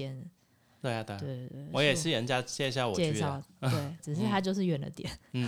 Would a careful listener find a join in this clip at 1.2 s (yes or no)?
no